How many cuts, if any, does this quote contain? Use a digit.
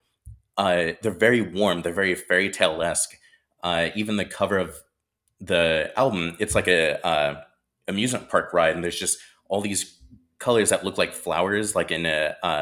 0